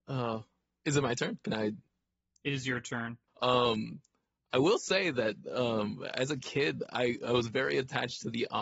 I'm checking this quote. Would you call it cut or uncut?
cut